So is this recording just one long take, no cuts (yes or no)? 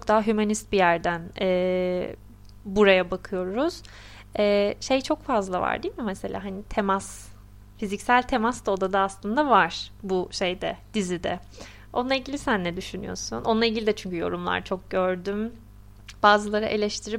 yes